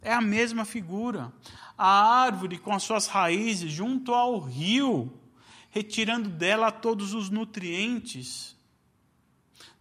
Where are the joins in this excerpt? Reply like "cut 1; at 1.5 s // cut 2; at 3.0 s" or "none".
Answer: none